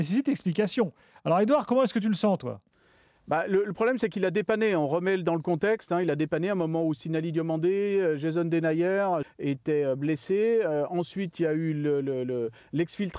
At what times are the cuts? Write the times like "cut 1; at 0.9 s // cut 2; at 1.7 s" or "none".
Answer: cut 1; at 9.2 s